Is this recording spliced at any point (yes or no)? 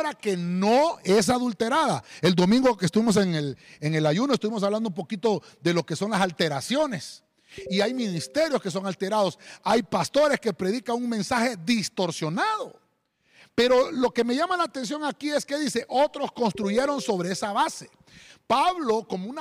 no